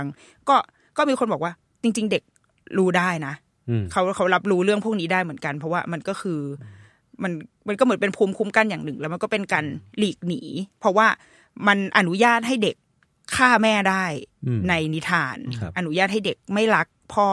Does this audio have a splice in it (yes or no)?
no